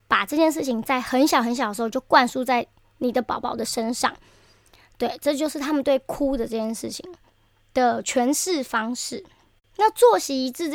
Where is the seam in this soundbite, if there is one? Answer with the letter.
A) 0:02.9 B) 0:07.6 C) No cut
C